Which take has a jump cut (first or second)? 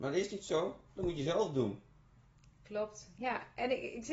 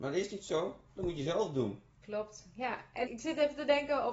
second